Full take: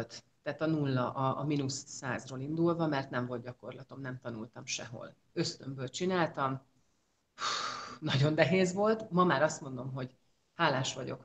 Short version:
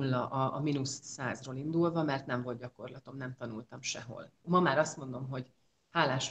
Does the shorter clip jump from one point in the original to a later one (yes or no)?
yes